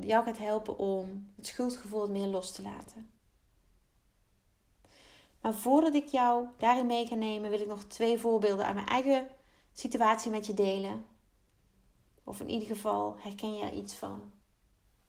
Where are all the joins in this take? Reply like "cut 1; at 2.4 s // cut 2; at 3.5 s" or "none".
cut 1; at 12.1 s